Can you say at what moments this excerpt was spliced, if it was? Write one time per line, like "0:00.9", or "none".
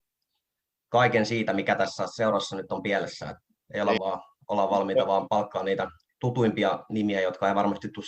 0:04.0